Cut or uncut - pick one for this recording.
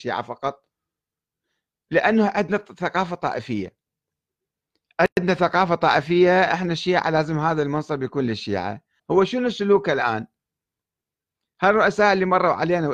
cut